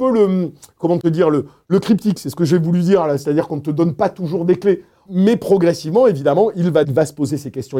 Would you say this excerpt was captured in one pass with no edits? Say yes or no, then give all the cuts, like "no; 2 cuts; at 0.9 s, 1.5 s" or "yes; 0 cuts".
no; 2 cuts; at 5.1 s, 6.8 s